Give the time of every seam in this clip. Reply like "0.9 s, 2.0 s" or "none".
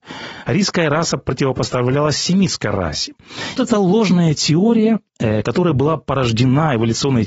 3.6 s, 5.1 s